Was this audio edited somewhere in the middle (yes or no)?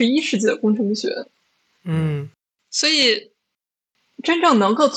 no